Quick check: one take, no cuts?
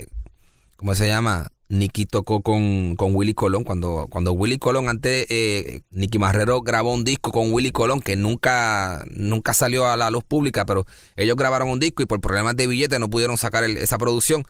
no; 1 cut; at 5.8 s

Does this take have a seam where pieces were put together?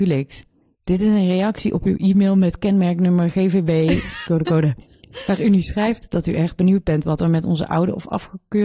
yes; 1 cut; at 4.3 s

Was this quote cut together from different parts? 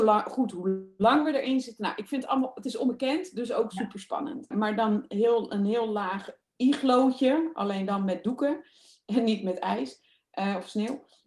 yes; 1 cut; at 4.5 s

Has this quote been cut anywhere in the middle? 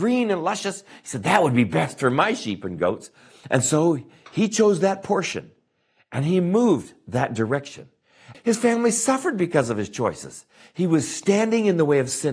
yes; 1 cut; at 8.3 s

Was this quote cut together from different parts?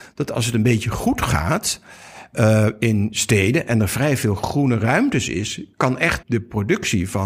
yes; 1 cut; at 6.2 s

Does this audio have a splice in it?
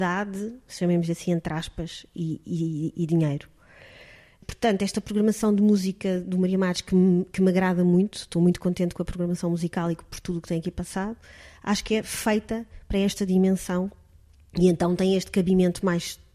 no; 0 cuts

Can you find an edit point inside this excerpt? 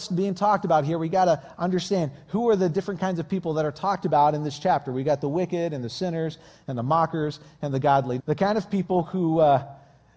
yes; 1 cut; at 8.2 s

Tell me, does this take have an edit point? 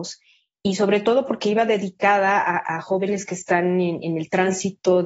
no; 0 cuts

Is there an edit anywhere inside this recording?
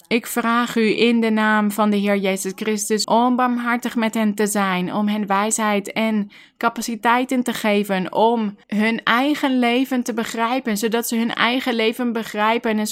yes; 2 cuts; at 3.0 s, 8.6 s

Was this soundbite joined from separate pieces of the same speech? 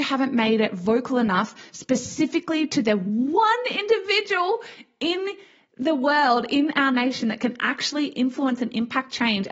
no; 0 cuts

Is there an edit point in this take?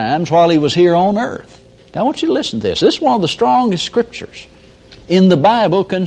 yes; 1 cut; at 1.8 s

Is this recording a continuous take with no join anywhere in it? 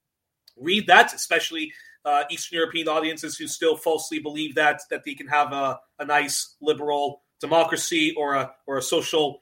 yes; 0 cuts

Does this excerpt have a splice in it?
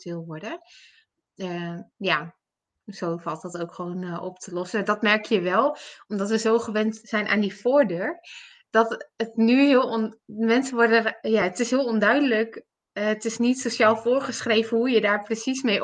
no; 0 cuts

